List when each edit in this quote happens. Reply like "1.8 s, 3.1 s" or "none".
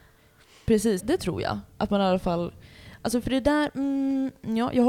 1.0 s